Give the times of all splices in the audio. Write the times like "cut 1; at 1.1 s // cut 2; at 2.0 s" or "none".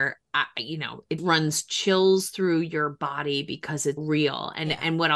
cut 1; at 1.2 s // cut 2; at 4.0 s